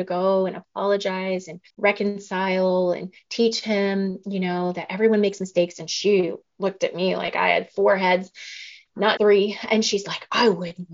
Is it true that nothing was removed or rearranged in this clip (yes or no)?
no